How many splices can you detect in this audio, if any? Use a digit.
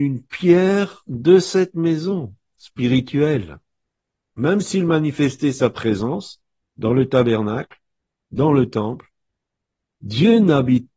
1